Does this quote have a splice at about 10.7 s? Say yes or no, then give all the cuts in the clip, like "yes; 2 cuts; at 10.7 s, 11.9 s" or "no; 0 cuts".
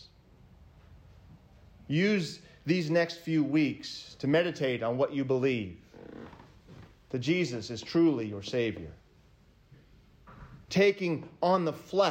yes; 1 cut; at 10.7 s